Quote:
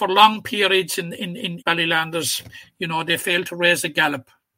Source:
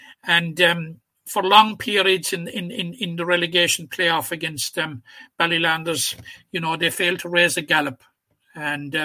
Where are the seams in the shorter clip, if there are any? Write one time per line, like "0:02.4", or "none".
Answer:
0:01.6

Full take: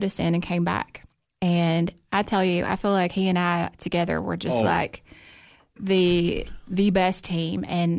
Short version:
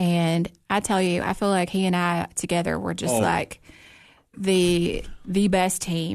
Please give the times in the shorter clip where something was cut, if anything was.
none

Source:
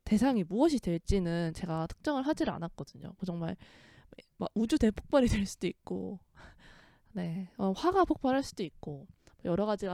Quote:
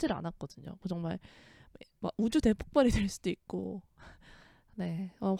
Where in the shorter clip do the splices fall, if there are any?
none

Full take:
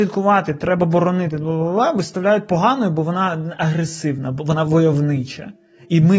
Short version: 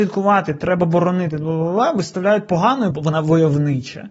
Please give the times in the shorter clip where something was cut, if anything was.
0:02.9

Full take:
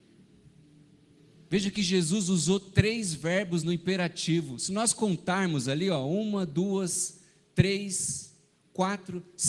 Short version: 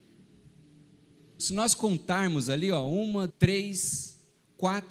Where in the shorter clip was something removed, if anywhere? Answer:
0:01.4
0:03.3

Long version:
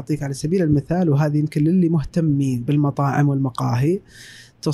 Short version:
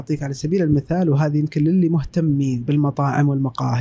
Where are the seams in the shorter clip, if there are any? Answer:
none

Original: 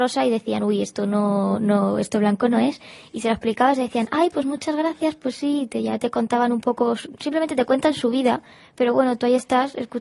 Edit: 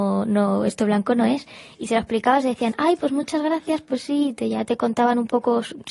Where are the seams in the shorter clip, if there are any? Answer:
none

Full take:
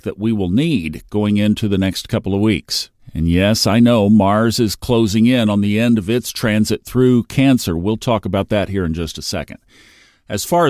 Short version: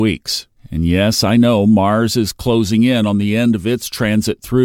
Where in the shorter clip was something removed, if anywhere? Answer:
none

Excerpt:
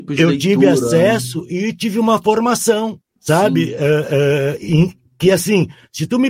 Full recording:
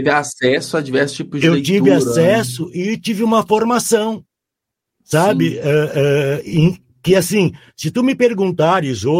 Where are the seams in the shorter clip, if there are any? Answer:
0:03.1

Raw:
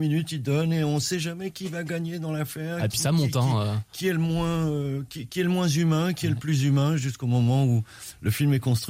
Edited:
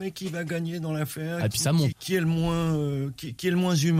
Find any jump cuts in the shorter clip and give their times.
0:01.9

